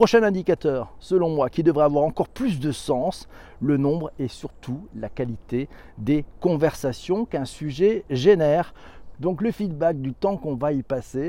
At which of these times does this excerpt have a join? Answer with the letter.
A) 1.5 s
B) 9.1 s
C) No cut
B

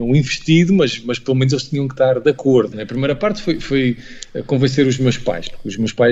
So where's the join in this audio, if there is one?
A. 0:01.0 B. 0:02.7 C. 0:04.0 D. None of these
B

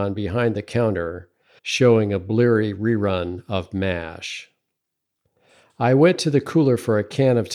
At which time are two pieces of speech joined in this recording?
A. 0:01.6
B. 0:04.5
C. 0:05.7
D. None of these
A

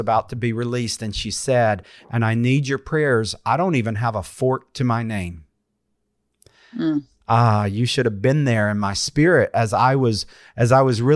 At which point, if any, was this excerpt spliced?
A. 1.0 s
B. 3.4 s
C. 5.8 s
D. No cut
D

